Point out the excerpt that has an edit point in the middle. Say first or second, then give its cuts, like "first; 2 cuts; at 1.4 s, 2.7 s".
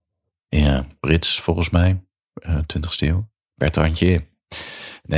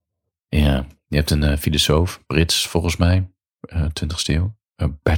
first; 2 cuts; at 1.0 s, 3.3 s